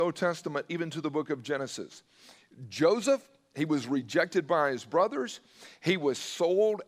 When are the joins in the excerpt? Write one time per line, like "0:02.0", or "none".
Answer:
none